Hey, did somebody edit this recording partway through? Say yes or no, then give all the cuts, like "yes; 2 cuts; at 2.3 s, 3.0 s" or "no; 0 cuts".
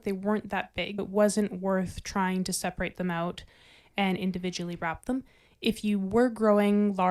yes; 1 cut; at 1.0 s